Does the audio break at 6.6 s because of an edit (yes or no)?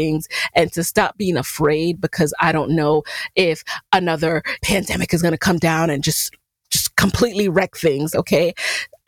no